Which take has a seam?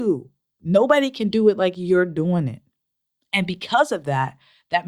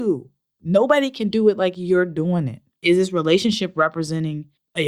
second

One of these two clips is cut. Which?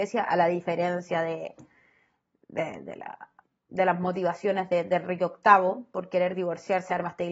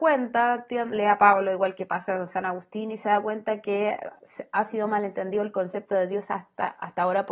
second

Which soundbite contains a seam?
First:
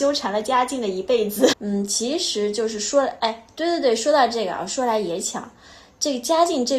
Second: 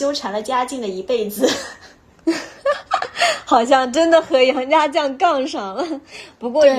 first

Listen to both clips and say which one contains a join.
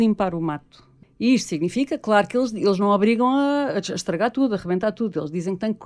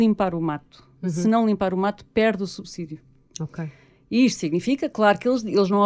first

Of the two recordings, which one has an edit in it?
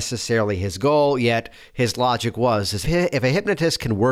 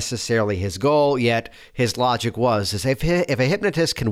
first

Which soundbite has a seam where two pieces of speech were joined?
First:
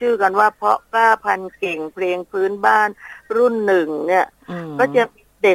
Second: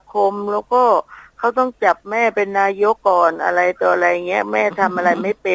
second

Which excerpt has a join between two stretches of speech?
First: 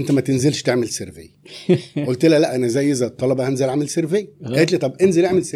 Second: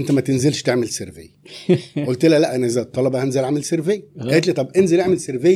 second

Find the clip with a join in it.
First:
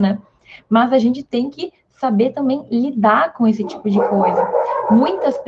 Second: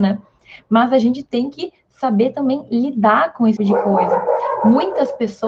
second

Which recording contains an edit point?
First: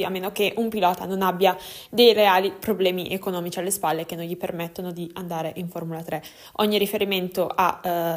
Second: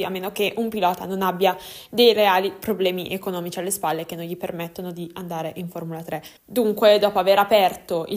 second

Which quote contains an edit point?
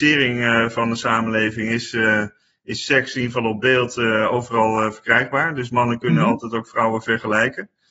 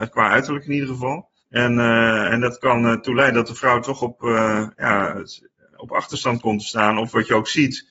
second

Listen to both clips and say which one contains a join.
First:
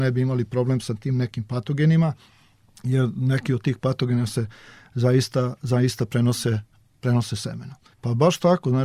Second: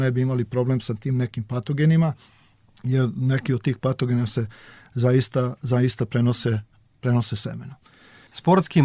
first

